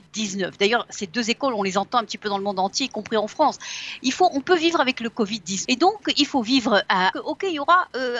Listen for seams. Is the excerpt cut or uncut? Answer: cut